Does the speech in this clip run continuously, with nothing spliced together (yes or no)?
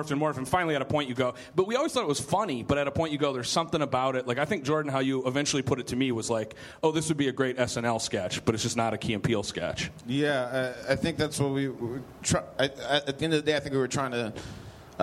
yes